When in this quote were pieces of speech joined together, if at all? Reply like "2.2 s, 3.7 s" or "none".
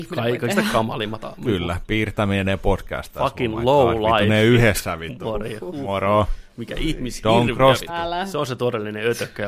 7.9 s